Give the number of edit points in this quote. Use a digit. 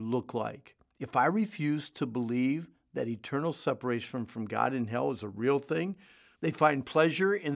1